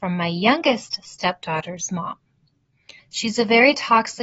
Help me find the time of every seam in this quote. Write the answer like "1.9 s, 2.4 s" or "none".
3.0 s